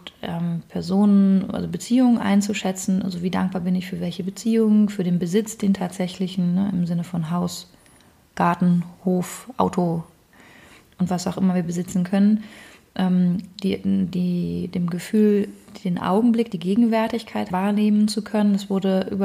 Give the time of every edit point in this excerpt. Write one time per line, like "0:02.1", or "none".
0:17.5